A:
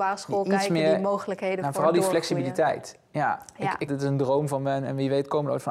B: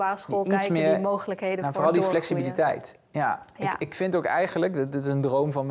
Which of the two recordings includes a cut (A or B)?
A